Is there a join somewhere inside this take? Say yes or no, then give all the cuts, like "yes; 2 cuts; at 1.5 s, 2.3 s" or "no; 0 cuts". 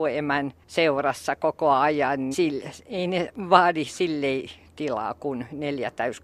yes; 1 cut; at 2.3 s